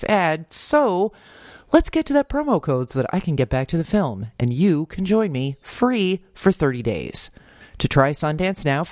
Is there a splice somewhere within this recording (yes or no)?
yes